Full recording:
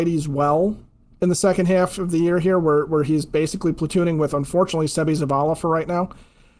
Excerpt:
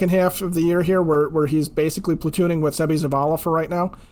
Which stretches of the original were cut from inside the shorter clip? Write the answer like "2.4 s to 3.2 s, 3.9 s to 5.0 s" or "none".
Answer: 4.3 s to 4.9 s